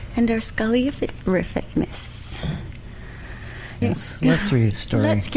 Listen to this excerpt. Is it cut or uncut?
cut